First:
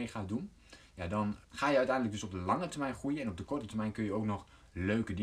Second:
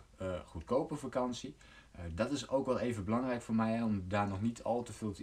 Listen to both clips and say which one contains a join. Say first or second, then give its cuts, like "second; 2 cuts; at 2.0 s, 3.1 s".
first; 1 cut; at 1.4 s